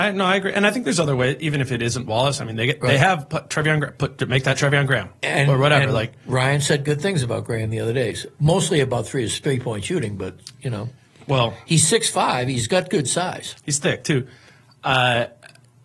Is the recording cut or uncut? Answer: uncut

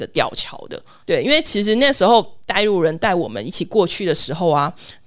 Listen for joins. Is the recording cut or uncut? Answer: cut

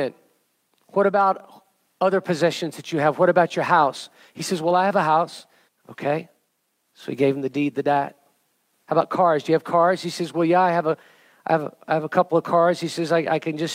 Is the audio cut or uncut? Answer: cut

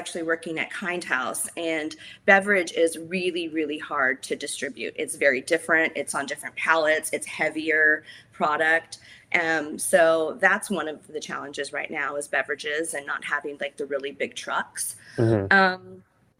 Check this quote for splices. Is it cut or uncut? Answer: uncut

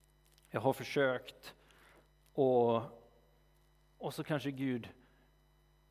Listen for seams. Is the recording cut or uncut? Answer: uncut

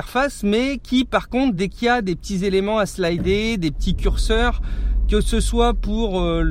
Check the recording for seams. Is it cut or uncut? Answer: uncut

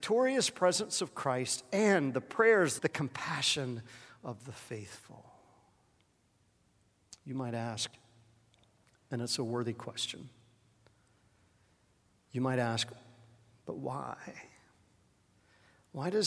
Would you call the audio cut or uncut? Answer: cut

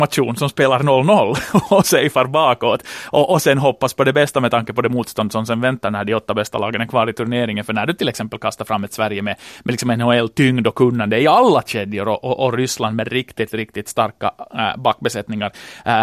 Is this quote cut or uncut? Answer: uncut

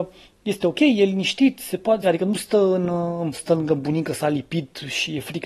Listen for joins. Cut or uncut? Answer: cut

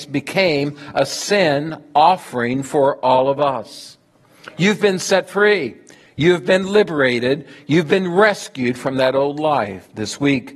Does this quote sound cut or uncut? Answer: uncut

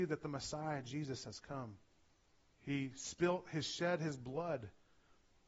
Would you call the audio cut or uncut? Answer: cut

